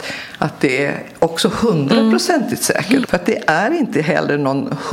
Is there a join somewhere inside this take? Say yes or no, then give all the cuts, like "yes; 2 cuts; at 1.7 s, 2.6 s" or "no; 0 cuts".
yes; 1 cut; at 3.0 s